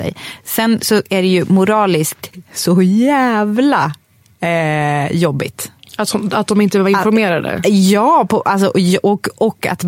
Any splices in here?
no; 0 cuts

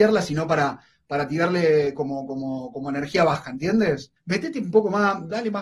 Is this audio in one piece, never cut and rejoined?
no; 1 cut; at 4.2 s

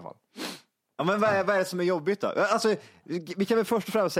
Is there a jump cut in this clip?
no; 0 cuts

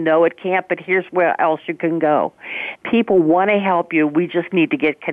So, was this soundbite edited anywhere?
yes; 1 cut; at 2.8 s

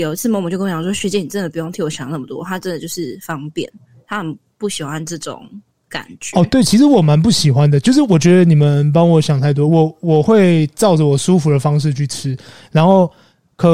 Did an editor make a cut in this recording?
no; 0 cuts

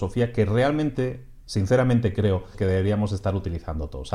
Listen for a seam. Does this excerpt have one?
yes; 1 cut; at 2.5 s

